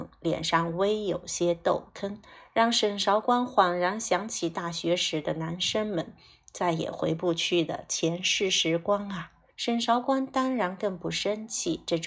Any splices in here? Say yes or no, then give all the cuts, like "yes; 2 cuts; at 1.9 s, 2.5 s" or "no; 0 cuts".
yes; 1 cut; at 9.5 s